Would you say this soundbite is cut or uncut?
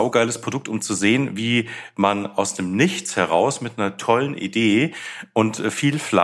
uncut